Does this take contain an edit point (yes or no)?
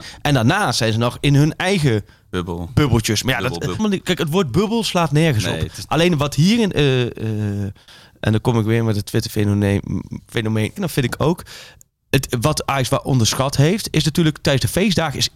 yes